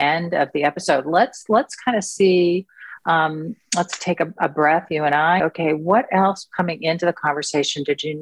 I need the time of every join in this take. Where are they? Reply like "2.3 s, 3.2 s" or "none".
5.4 s